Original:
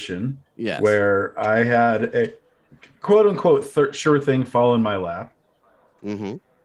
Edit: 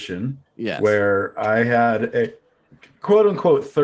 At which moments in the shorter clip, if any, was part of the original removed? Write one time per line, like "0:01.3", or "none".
none

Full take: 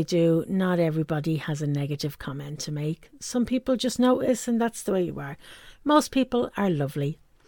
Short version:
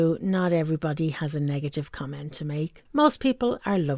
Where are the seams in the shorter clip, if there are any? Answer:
0:02.8

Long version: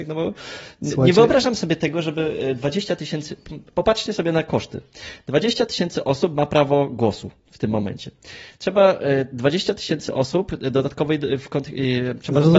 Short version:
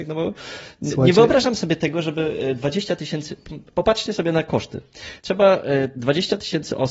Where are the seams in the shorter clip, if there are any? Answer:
0:05.2

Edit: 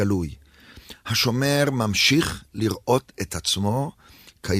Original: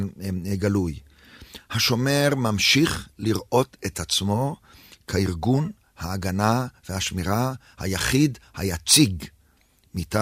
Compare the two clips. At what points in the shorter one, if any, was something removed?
none

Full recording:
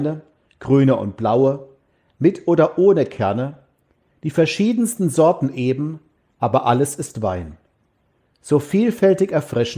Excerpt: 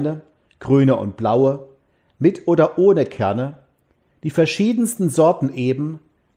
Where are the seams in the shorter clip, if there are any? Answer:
none

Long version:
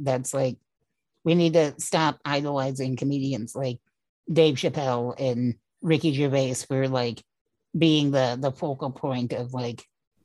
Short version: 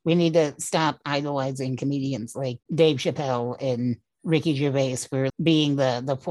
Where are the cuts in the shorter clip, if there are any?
0:02.6
0:05.3

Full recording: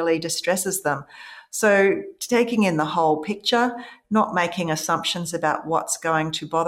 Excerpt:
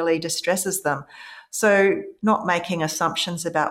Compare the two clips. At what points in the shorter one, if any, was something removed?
0:02.2

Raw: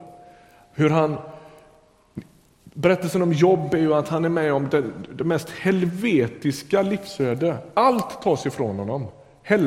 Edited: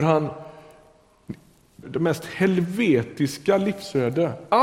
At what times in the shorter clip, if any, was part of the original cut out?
0:01.8

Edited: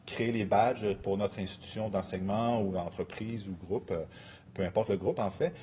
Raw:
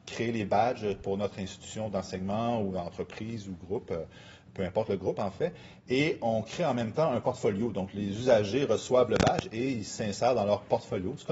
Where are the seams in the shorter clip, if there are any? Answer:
none

